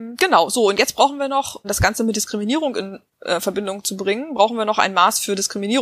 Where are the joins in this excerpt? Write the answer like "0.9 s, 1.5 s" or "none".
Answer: 1.6 s